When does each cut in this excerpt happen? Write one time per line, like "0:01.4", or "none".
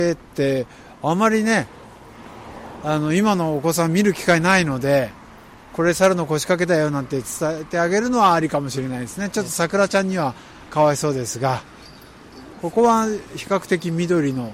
none